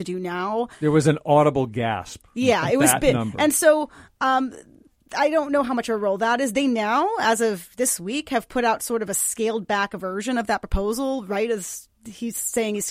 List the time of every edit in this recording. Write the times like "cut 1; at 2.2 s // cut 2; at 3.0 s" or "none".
none